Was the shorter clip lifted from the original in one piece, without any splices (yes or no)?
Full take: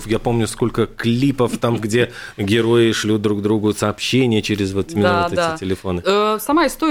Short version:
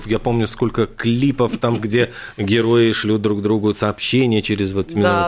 yes